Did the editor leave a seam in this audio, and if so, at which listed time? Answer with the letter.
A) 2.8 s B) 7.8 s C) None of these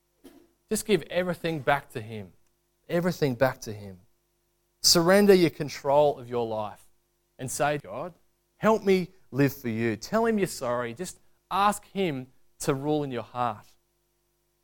B